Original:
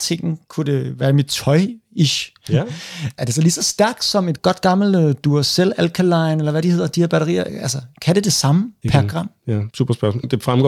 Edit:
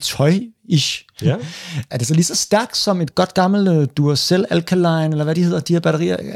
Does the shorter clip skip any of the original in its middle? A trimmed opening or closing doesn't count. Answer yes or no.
no